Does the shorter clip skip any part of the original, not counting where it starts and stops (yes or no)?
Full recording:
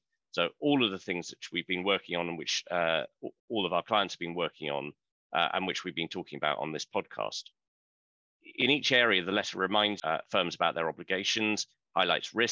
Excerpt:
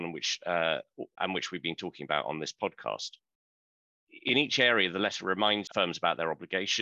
yes